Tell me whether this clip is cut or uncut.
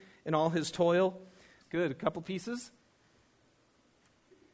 cut